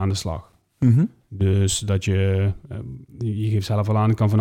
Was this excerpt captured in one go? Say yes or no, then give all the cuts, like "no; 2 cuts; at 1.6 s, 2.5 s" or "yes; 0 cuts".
yes; 0 cuts